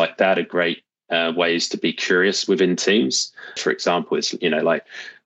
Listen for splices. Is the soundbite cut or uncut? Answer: cut